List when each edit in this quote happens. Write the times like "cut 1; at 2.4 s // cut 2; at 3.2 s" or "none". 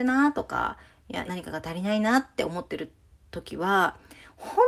cut 1; at 1.3 s

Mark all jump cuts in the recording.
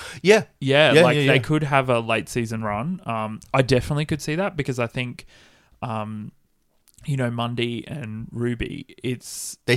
none

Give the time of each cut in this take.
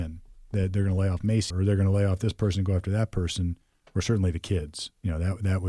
cut 1; at 1.5 s

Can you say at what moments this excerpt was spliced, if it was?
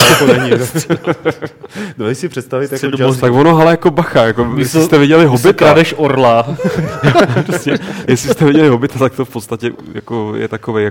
cut 1; at 3.2 s // cut 2; at 8.1 s

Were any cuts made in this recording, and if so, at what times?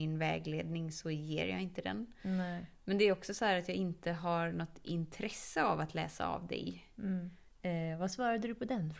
cut 1; at 7.5 s

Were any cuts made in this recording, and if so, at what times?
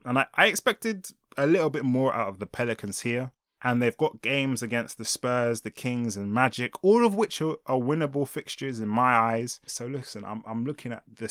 cut 1; at 3.6 s // cut 2; at 9.7 s

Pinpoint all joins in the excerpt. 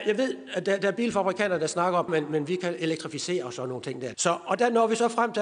cut 1; at 2.1 s // cut 2; at 4.1 s

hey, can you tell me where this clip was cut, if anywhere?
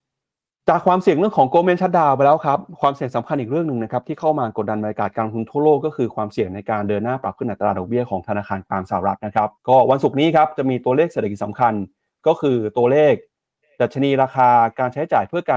cut 1; at 9.6 s

